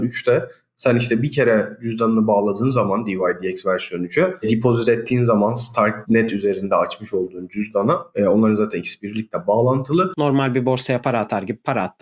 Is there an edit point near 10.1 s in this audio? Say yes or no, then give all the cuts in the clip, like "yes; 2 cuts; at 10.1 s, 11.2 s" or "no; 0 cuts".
yes; 1 cut; at 10.1 s